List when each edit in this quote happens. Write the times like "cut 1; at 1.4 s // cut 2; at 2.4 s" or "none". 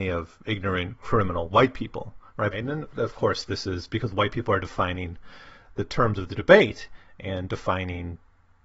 cut 1; at 2.5 s